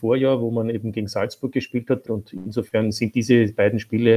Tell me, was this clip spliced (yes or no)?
yes